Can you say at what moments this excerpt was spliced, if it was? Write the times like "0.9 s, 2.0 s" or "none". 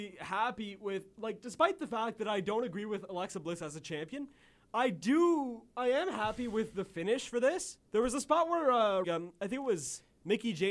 7.9 s, 9.0 s